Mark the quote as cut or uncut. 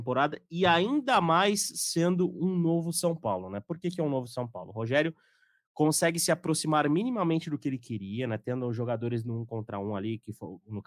uncut